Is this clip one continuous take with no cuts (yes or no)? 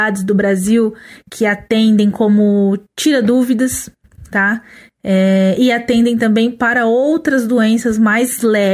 yes